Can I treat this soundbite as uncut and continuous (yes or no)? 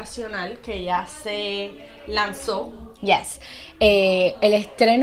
yes